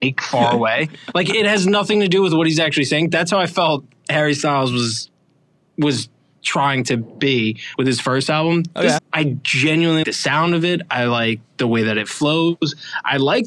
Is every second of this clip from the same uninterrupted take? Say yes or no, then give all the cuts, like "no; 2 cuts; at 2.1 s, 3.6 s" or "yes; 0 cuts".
no; 2 cuts; at 9.0 s, 10.0 s